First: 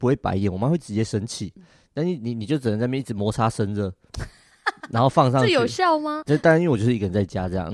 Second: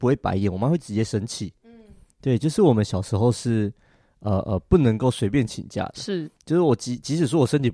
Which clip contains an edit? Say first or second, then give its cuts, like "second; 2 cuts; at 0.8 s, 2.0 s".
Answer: first; 2 cuts; at 1.6 s, 6.2 s